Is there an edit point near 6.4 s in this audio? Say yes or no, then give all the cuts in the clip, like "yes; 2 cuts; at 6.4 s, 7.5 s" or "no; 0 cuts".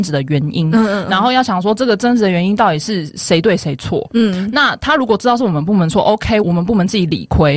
yes; 1 cut; at 6.4 s